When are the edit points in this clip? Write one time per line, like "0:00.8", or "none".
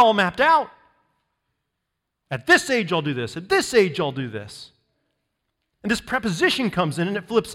none